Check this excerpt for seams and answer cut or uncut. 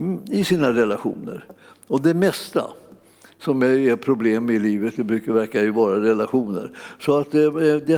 uncut